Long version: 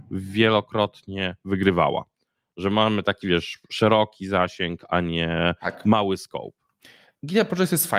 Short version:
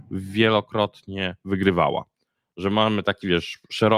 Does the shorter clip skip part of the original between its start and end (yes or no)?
no